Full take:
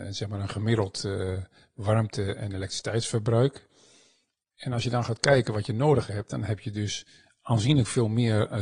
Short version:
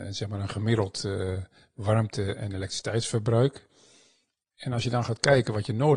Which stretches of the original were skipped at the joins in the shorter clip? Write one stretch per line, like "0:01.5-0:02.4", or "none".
none